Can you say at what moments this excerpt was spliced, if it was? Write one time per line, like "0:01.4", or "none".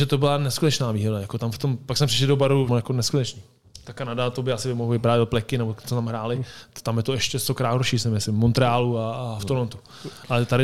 0:02.7